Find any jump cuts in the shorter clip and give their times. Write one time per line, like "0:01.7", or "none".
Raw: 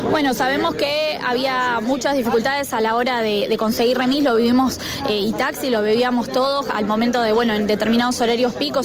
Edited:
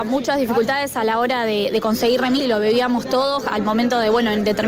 0:02.4